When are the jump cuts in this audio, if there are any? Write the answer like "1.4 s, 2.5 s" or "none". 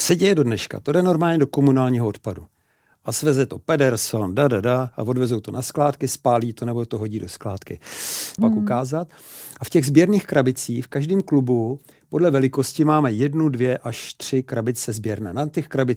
8.4 s